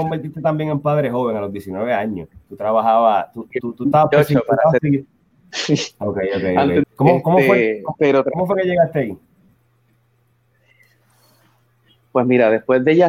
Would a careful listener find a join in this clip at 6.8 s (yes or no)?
yes